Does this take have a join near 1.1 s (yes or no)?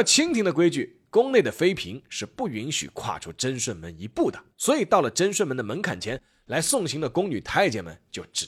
no